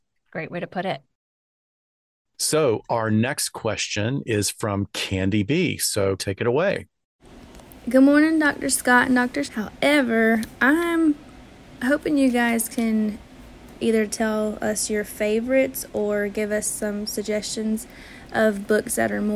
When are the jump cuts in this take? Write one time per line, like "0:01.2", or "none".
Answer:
0:06.2
0:09.4

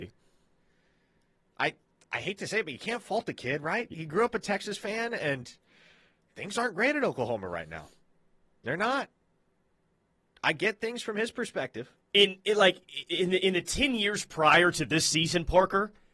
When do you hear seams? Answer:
none

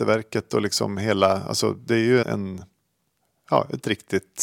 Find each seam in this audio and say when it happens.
0:02.2

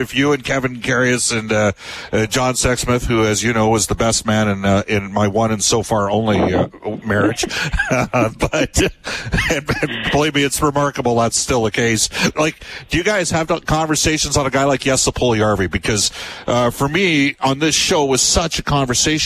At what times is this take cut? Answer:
0:12.3
0:17.4

